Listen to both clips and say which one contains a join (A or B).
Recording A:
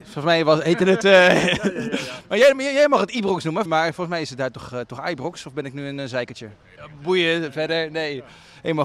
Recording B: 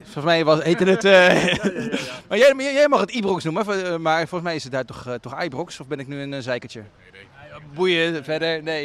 A